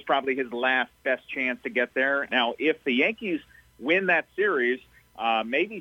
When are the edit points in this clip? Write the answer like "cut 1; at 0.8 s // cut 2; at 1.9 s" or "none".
cut 1; at 2.3 s